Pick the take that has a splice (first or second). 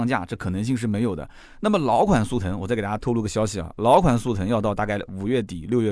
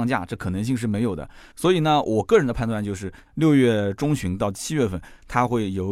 second